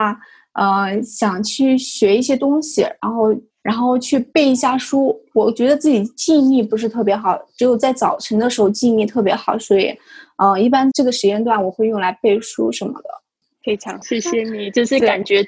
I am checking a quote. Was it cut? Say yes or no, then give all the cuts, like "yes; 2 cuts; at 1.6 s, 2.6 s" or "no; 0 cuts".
yes; 2 cuts; at 10.9 s, 14.0 s